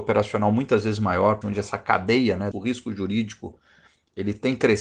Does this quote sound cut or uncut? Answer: cut